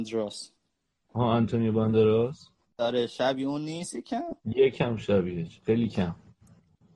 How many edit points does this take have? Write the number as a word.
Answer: three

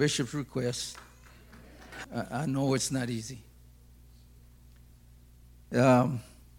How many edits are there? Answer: one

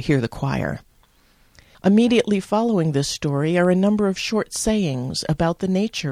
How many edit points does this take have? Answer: one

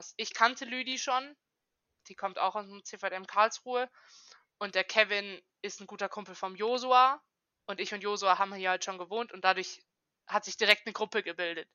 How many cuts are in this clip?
zero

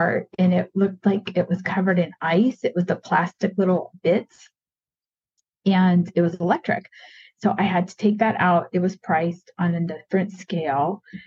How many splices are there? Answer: zero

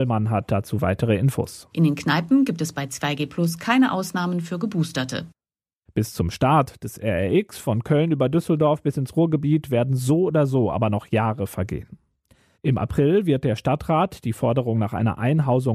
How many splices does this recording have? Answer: three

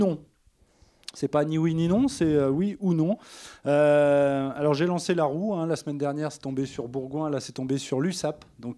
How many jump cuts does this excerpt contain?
zero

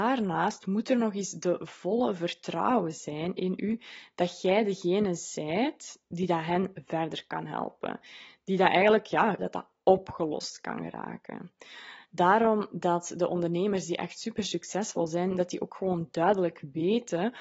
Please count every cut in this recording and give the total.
two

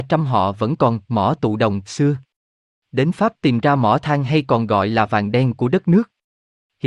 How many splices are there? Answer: zero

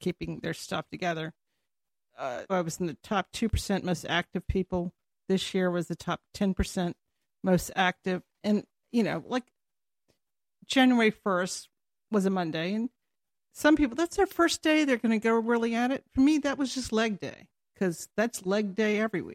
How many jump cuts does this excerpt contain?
one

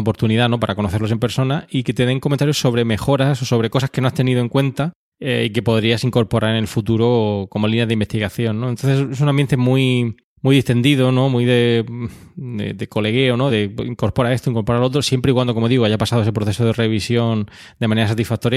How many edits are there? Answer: one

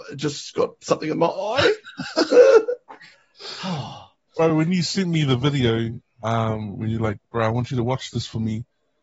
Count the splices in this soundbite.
zero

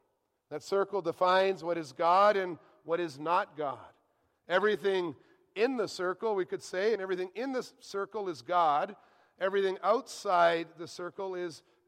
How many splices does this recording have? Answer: one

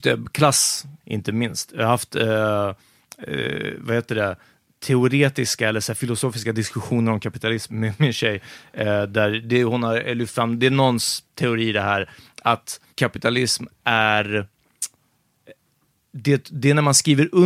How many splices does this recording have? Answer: three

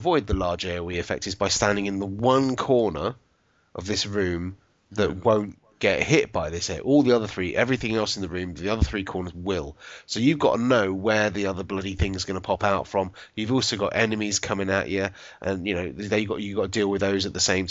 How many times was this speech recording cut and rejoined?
zero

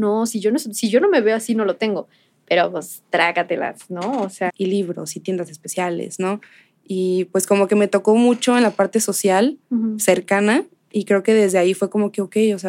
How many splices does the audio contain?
one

